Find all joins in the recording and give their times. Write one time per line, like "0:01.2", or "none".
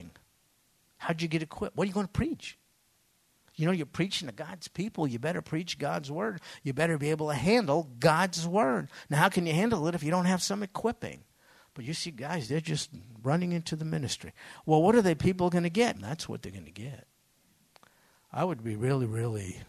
0:15.9